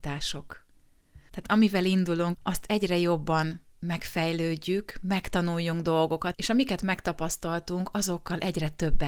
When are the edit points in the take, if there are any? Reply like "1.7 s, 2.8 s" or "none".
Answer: 1.3 s, 2.3 s, 6.3 s